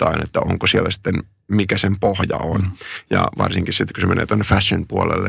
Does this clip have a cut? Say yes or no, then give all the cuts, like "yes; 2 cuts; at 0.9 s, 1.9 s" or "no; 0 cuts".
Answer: no; 0 cuts